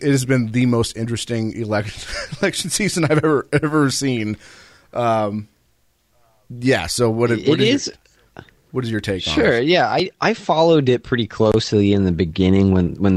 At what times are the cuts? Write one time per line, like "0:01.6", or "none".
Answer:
none